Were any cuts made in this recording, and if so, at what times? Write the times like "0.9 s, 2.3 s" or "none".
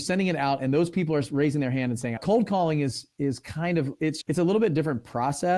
2.2 s, 4.2 s